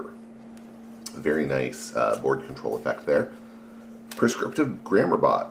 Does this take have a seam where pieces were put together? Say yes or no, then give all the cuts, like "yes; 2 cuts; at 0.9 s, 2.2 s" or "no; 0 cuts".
no; 0 cuts